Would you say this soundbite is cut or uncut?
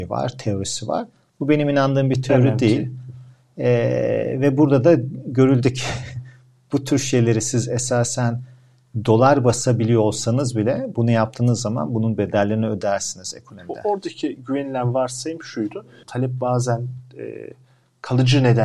cut